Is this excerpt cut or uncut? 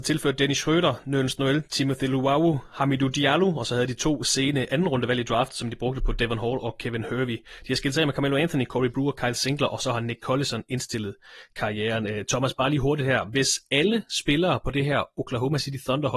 uncut